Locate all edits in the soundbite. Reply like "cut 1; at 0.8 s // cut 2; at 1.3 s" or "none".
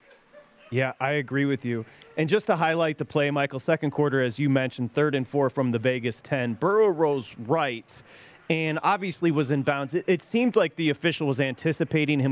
none